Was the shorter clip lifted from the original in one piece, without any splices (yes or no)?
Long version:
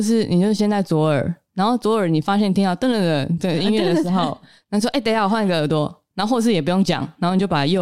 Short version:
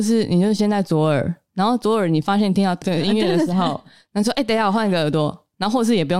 no